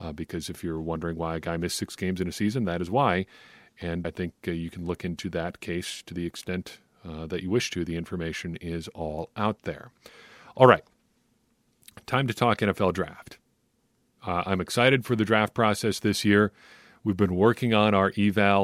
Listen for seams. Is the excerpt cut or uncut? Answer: cut